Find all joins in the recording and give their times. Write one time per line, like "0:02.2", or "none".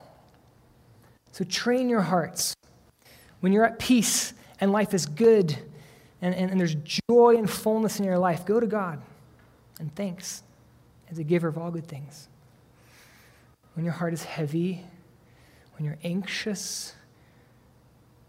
none